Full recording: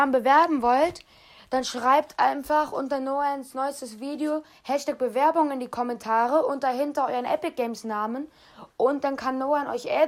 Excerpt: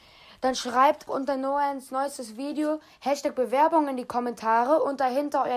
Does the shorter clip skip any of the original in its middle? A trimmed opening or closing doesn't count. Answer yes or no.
yes